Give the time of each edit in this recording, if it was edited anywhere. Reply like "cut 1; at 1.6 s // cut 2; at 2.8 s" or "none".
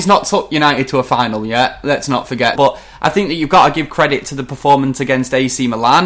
cut 1; at 2.6 s